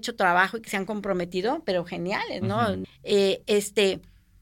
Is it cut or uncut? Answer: cut